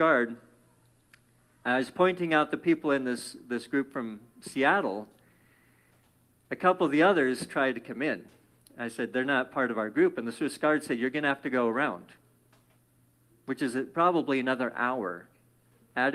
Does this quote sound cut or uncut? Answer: uncut